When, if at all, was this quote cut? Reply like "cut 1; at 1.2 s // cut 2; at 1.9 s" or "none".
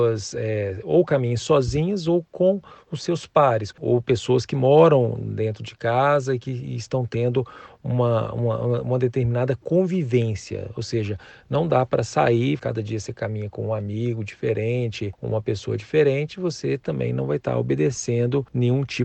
cut 1; at 3.7 s // cut 2; at 12.6 s